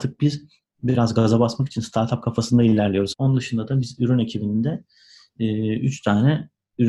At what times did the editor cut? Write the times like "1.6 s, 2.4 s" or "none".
3.1 s